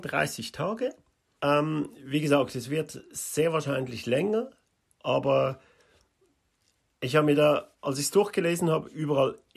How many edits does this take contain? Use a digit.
1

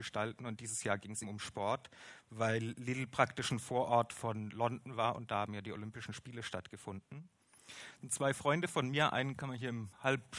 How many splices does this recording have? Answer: 1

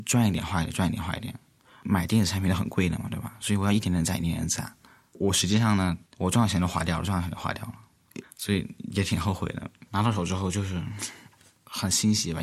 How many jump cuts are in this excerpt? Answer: 3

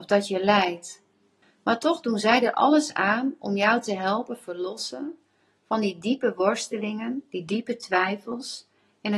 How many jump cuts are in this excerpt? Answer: 1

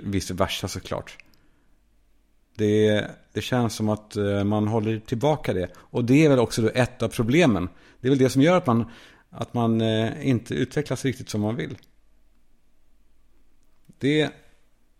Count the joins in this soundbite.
0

